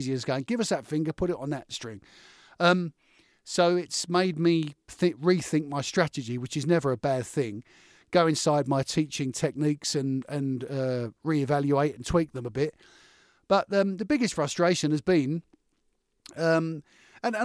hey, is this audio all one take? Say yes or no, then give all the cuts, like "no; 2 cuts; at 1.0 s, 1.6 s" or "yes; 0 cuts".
yes; 0 cuts